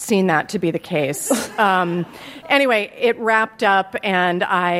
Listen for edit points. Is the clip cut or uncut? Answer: uncut